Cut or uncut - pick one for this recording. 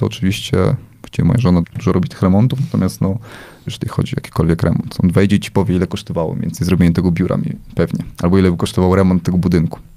cut